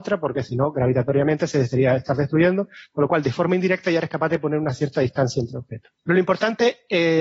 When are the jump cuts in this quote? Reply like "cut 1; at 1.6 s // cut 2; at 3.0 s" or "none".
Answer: cut 1; at 6.0 s